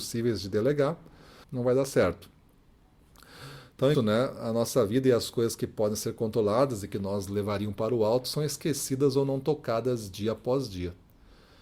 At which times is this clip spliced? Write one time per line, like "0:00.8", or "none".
0:01.4
0:03.9